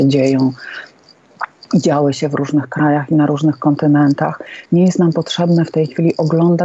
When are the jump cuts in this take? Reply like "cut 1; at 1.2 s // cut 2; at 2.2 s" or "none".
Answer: none